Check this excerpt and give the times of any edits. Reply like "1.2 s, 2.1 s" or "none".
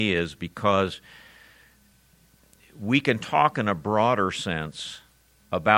none